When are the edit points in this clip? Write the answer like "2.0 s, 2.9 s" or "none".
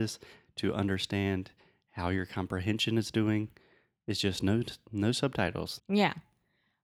5.8 s